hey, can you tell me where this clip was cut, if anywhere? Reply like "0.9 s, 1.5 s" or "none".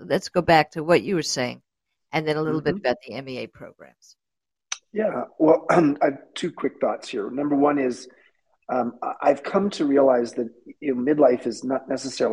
5.9 s